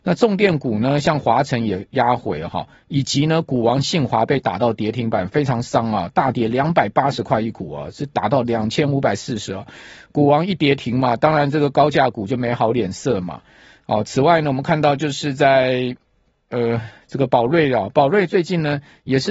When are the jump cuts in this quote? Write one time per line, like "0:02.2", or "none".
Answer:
none